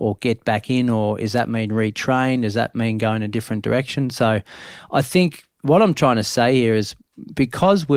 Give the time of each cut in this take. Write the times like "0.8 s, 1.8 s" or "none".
5.5 s

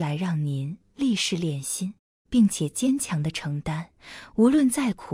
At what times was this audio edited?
2.2 s

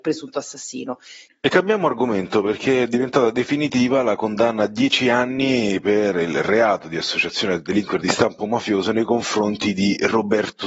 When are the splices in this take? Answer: 1.3 s

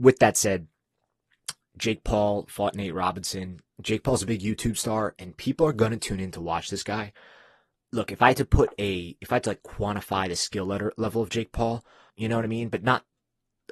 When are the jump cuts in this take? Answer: 7.8 s, 12.1 s

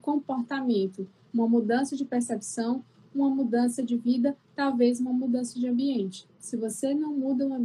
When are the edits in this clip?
none

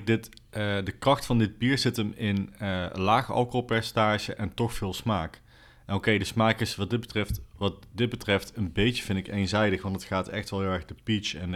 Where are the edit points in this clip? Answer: none

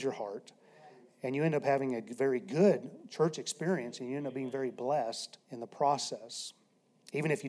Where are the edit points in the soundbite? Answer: 5.4 s

